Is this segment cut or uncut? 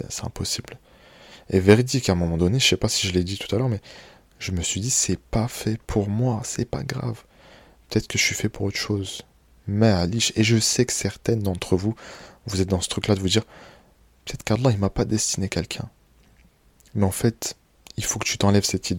uncut